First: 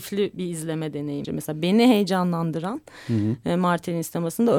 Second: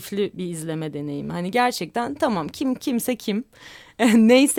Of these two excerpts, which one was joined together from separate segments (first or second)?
first